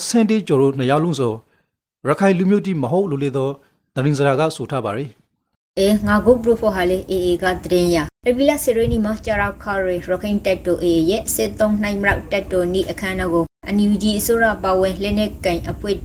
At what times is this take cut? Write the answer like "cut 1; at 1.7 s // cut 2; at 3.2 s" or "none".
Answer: none